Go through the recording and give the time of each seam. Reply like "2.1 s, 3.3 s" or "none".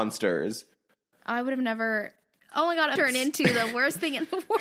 1.1 s, 3.0 s